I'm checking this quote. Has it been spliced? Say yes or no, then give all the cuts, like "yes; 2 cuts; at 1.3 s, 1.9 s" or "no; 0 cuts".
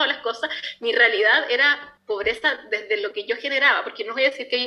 yes; 1 cut; at 2.0 s